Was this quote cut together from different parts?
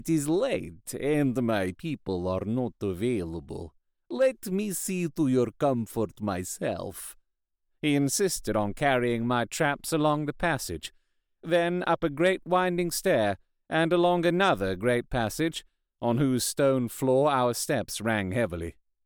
no; 0 cuts

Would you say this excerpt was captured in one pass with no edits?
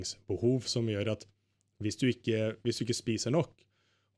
yes; 0 cuts

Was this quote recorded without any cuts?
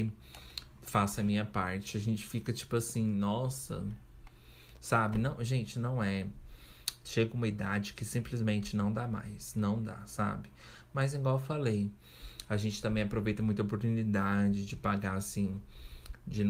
yes; 0 cuts

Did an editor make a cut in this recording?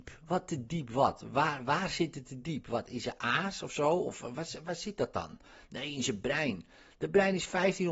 no; 0 cuts

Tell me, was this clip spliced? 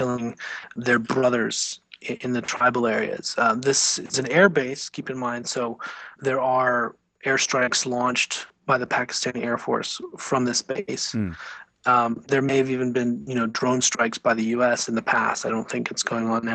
no; 0 cuts

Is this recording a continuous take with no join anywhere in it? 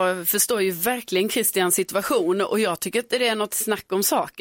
yes; 0 cuts

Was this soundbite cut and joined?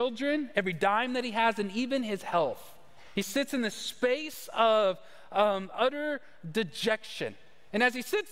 no; 0 cuts

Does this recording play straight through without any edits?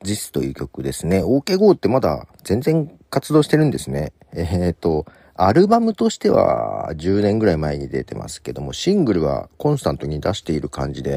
yes; 0 cuts

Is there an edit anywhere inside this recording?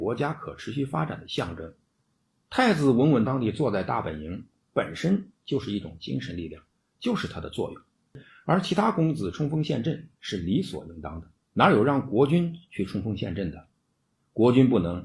yes; 2 cuts; at 3.3 s, 11.4 s

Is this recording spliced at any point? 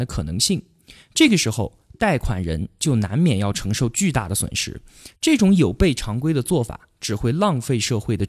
no; 0 cuts

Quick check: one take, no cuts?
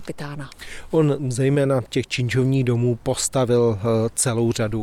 yes; 0 cuts

